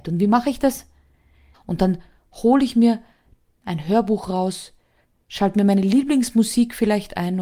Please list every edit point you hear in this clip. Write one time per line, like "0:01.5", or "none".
0:01.5